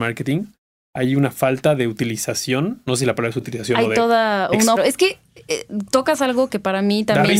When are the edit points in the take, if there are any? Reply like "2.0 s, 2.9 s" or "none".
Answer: 4.8 s